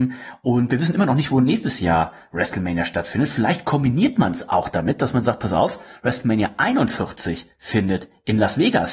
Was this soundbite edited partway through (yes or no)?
no